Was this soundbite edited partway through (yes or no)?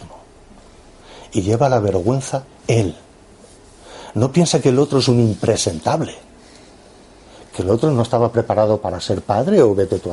no